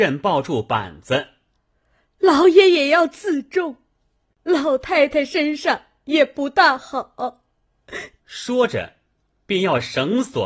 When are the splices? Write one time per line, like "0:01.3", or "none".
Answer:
0:01.5
0:04.4
0:08.2